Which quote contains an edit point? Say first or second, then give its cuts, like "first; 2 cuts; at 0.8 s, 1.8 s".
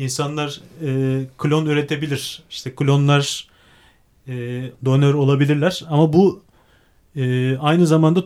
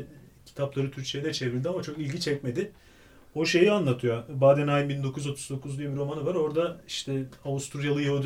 first; 1 cut; at 4.7 s